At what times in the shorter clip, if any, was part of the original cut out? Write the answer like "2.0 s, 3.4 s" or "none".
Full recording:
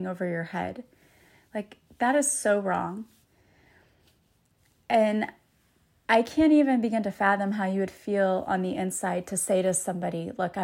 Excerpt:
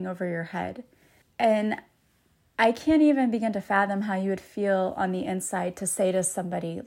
1.2 s